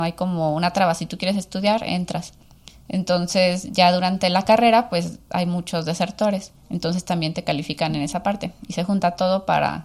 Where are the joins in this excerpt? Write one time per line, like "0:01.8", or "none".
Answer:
0:06.6